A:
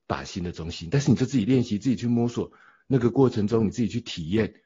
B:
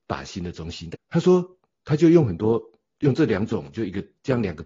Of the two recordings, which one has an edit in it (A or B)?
B